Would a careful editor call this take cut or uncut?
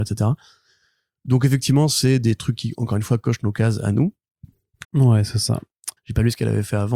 cut